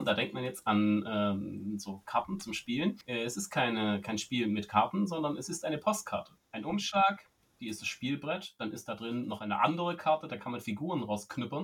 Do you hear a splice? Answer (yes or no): yes